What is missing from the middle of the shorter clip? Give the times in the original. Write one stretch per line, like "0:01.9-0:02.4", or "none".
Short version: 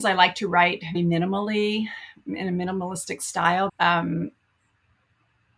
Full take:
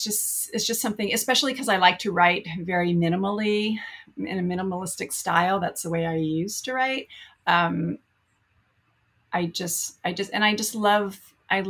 0:02.6-0:02.9
0:05.6-0:07.4